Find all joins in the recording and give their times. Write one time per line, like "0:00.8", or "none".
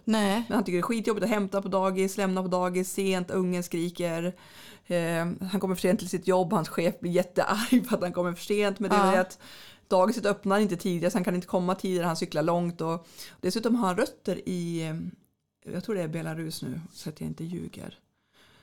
none